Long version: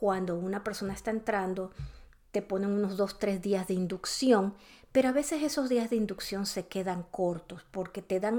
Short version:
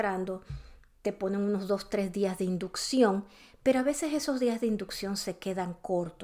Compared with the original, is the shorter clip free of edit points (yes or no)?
yes